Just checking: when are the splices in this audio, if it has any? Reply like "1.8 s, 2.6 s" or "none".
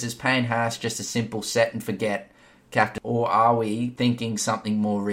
none